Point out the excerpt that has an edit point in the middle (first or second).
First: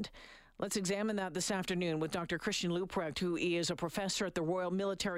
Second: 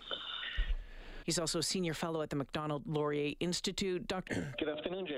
second